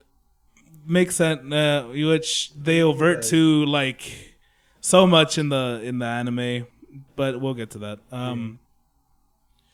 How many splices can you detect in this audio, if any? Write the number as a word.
zero